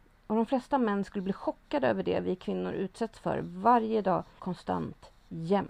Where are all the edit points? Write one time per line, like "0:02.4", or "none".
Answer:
0:04.4